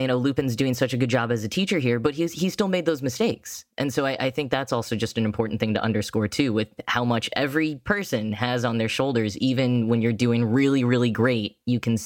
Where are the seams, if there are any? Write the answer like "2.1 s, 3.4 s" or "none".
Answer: none